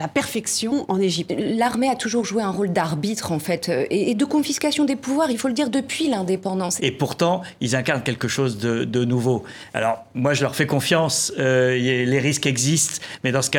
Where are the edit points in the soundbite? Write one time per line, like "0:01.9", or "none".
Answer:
0:01.3
0:06.8